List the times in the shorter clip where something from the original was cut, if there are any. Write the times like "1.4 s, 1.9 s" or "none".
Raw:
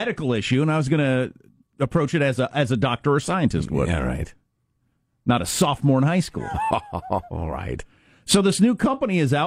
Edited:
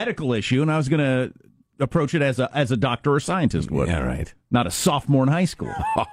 4.4 s